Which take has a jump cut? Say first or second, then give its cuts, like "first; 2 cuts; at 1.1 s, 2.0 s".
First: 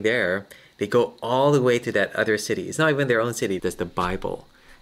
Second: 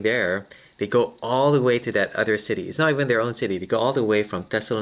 first; 1 cut; at 3.6 s